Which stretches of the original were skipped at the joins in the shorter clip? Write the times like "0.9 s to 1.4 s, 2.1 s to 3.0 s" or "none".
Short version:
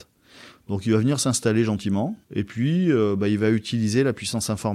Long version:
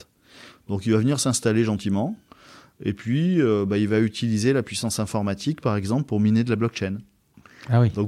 2.2 s to 2.7 s